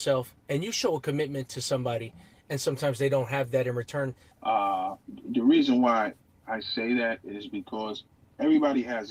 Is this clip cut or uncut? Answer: cut